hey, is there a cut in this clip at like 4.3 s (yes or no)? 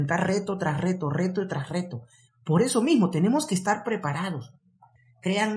no